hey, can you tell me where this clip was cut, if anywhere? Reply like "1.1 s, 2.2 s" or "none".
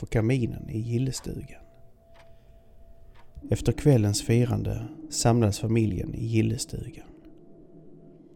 3.4 s